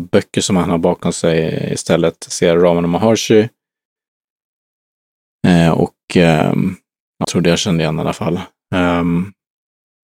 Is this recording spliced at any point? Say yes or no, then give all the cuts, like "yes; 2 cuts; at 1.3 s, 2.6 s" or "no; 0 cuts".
yes; 1 cut; at 7.2 s